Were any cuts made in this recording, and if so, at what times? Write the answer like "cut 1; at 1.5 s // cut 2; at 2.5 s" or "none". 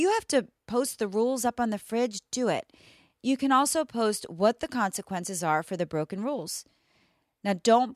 none